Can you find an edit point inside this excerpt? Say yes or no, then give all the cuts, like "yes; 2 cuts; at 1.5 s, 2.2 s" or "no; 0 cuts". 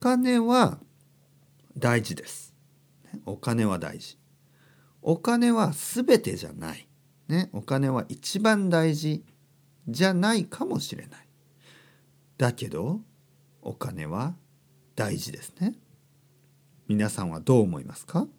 no; 0 cuts